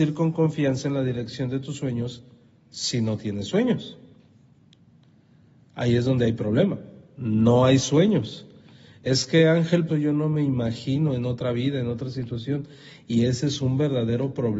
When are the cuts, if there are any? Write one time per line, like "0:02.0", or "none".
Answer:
0:09.9